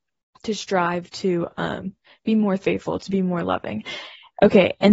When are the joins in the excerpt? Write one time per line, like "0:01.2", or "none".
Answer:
none

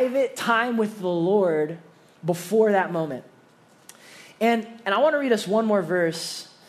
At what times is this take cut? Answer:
none

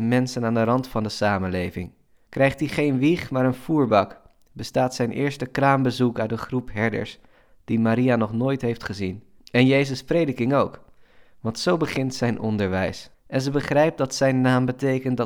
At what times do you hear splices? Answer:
0:02.3
0:09.4
0:13.1

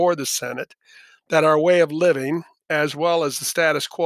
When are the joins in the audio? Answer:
none

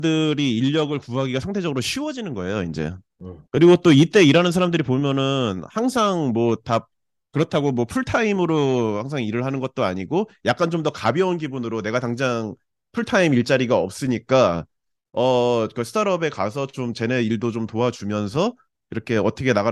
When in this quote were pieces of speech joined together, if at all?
0:03.5

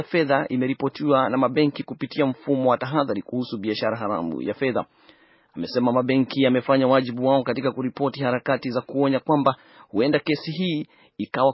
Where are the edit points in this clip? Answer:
none

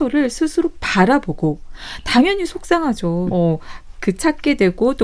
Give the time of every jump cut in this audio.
0:03.3

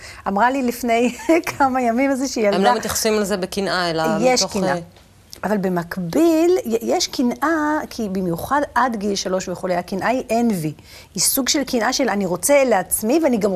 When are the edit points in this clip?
none

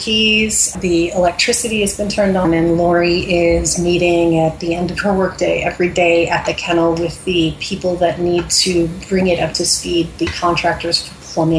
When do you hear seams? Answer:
0:02.4

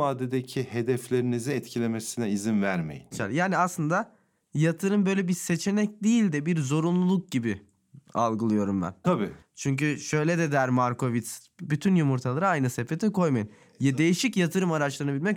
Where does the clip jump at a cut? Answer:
0:03.1
0:09.0

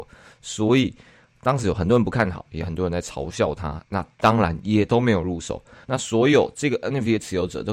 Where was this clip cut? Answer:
0:05.8

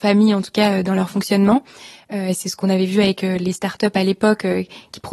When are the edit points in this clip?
none

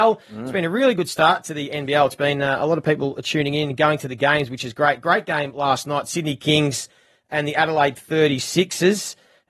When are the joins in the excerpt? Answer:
none

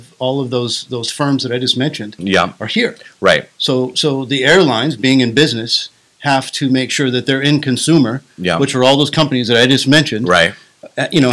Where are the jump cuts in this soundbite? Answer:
none

